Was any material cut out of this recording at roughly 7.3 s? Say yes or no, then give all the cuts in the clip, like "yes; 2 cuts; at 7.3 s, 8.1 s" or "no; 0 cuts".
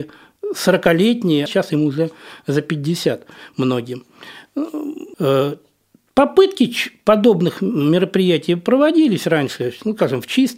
no; 2 cuts; at 1.5 s, 5.1 s